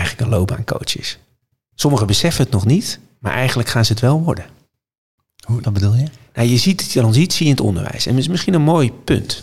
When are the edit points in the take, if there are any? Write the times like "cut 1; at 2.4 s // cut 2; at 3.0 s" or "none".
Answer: cut 1; at 5.6 s

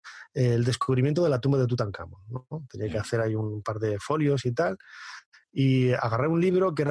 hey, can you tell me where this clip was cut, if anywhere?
none

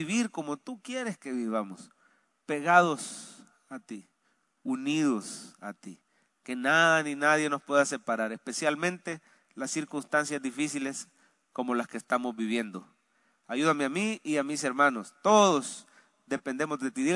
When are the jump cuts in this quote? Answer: none

